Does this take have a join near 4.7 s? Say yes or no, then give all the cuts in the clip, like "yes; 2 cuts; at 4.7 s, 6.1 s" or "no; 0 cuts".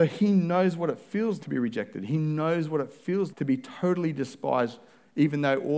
no; 2 cuts; at 1.4 s, 3.3 s